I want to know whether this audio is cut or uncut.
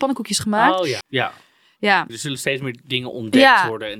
cut